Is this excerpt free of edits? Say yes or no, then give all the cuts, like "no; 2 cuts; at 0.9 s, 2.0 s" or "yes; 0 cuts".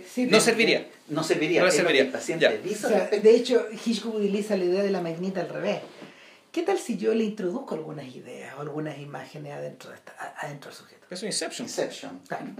yes; 0 cuts